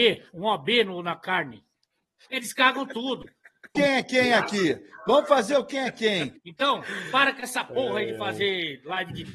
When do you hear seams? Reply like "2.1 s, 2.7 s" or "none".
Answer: 2.2 s, 3.7 s, 6.3 s